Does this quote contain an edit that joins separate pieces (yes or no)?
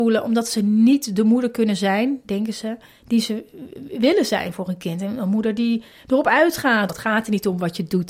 yes